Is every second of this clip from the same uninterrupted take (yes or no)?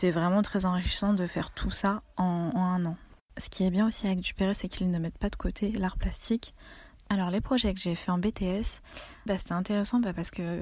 no